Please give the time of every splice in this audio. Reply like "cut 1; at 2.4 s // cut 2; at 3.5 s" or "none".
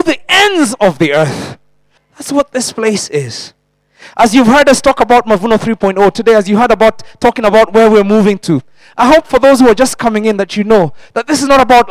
cut 1; at 2.0 s